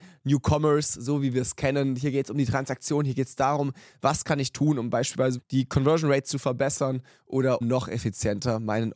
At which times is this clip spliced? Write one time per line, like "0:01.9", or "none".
0:05.4
0:07.6